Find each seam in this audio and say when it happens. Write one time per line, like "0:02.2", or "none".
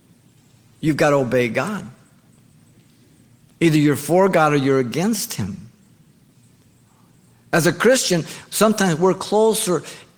none